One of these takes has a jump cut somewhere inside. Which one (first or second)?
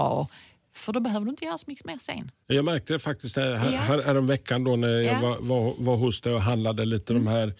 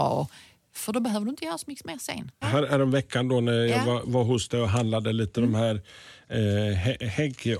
second